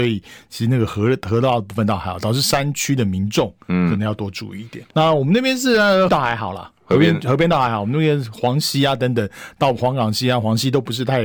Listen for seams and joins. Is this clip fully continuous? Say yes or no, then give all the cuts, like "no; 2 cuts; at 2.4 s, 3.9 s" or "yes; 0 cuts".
no; 2 cuts; at 4.9 s, 6.1 s